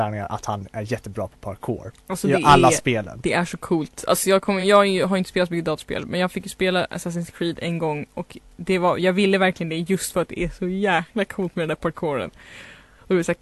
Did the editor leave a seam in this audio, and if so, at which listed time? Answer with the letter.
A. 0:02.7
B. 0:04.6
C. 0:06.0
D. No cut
D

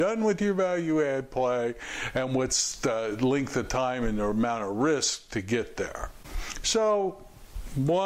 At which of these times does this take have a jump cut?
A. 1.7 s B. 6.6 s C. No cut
B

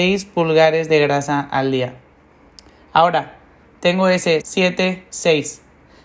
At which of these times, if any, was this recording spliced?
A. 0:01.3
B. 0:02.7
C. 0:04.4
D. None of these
C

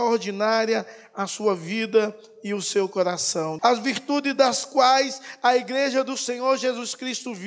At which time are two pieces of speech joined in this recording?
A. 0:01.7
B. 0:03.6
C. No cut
B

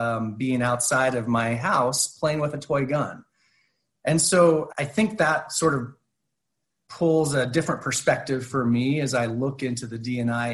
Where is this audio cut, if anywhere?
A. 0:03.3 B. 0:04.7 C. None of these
B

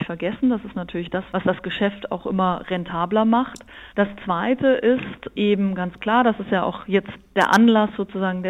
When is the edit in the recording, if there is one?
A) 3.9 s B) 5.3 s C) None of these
A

